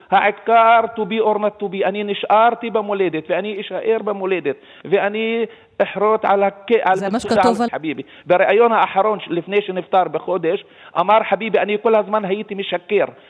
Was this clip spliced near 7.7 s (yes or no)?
yes